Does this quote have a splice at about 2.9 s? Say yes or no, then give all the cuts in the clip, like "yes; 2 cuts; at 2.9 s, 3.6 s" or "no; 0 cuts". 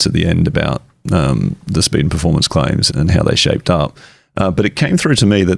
yes; 1 cut; at 2.9 s